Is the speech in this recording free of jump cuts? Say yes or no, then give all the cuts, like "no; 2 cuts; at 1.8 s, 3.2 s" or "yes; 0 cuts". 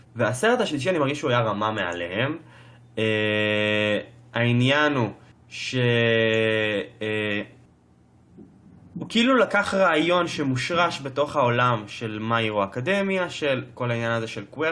yes; 0 cuts